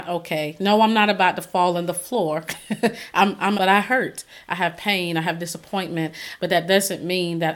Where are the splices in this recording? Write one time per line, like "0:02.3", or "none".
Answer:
0:03.5
0:06.4